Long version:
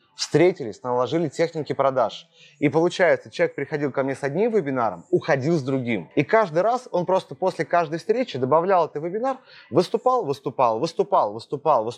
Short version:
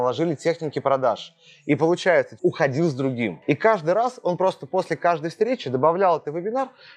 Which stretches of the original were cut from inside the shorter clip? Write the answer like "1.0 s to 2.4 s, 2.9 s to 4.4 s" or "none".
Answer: 3.3 s to 5.1 s